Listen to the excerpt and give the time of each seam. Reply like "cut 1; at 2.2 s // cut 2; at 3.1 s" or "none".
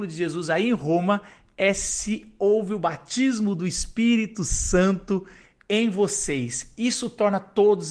none

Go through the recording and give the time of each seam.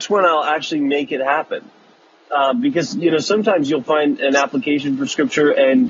none

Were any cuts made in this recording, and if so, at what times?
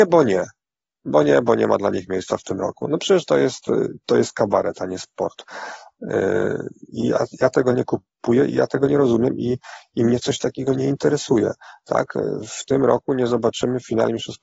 none

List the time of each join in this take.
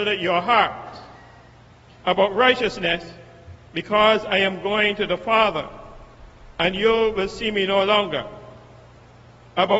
cut 1; at 2.0 s

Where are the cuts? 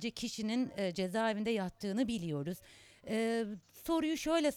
none

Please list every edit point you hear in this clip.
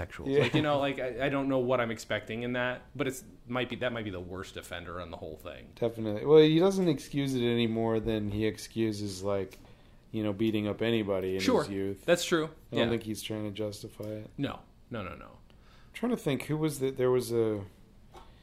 none

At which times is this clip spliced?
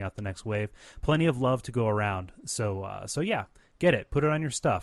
none

